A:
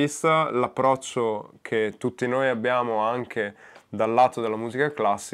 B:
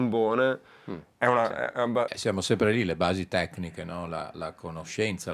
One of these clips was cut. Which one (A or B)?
B